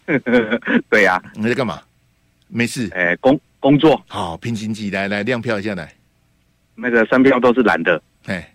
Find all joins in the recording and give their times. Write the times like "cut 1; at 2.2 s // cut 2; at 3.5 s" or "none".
none